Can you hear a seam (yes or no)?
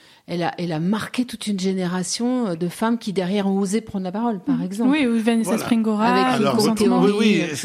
no